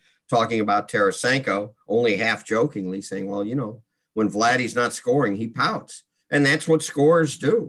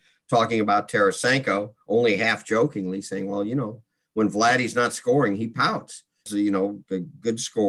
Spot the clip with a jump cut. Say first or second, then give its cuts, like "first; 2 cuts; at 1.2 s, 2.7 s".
second; 1 cut; at 6.3 s